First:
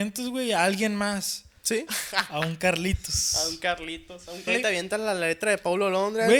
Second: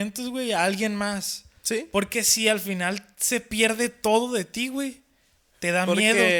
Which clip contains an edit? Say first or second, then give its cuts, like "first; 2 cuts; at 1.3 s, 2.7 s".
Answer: first; 2 cuts; at 1.9 s, 4.5 s